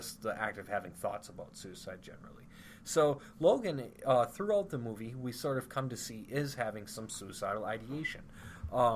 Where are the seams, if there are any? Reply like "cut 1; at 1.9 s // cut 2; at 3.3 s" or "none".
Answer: none